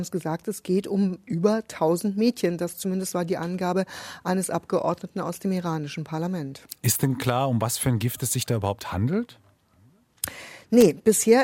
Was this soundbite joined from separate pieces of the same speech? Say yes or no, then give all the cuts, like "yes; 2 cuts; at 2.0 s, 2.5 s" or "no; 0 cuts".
no; 0 cuts